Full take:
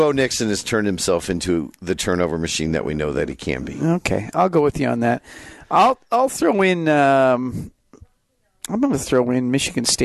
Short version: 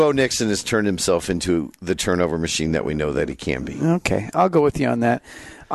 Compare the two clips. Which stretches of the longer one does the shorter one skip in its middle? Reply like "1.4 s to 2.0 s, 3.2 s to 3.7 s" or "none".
none